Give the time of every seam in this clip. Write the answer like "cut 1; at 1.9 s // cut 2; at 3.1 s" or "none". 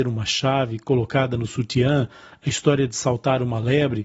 none